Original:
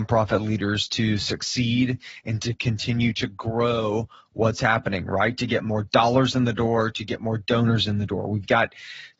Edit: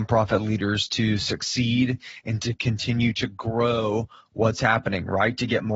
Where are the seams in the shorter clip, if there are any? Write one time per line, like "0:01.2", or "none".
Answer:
none